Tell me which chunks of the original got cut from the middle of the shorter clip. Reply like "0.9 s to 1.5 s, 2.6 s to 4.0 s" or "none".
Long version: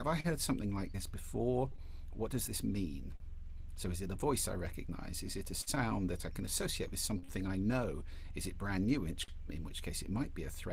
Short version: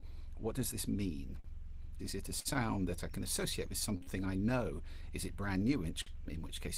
3.7 s to 5.2 s

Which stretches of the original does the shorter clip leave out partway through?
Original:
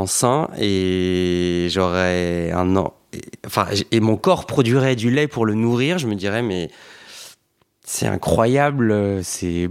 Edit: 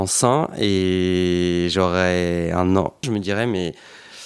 3.0 s to 6.0 s

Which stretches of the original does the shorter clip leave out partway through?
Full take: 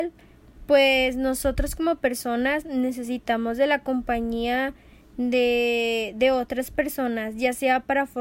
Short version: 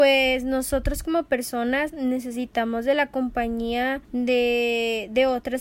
4.8 s to 5.1 s

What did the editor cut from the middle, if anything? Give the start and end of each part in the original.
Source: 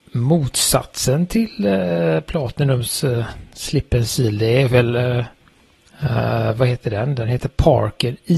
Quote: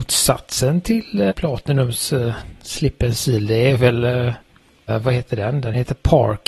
1.8 s to 2.2 s, 5.8 s to 6.4 s

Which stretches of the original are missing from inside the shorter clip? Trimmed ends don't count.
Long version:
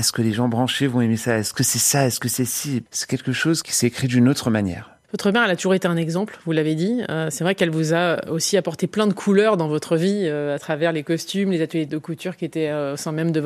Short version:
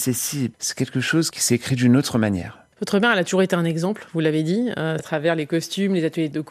7.3 s to 10.6 s

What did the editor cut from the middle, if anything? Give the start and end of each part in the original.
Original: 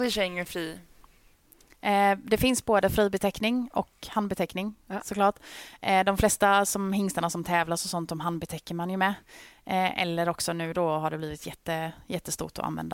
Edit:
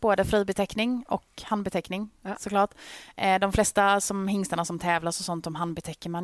none

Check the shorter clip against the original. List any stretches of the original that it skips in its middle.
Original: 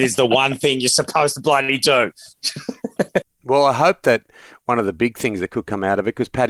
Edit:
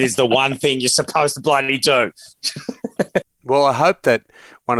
none

